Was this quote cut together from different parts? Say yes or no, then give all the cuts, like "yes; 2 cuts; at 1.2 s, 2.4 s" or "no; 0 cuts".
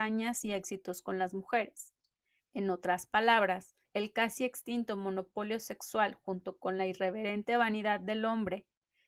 yes; 2 cuts; at 2.4 s, 3.8 s